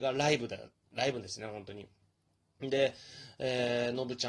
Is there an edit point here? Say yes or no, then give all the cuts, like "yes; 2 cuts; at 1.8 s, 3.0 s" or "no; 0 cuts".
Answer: no; 0 cuts